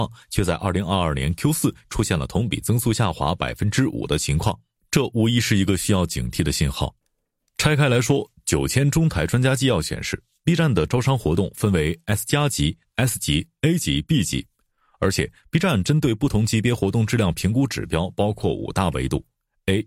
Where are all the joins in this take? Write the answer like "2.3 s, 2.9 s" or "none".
none